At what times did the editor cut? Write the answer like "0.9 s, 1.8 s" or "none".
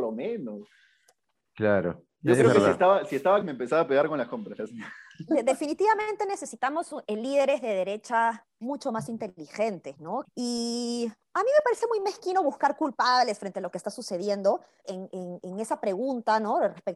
3.4 s, 10.2 s, 14.8 s